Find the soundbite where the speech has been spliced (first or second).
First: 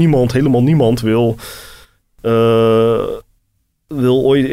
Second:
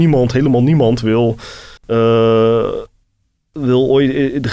second